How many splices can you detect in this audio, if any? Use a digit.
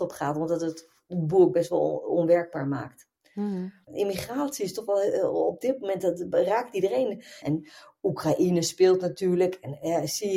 2